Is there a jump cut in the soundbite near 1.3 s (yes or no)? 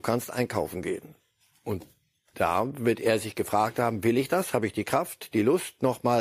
no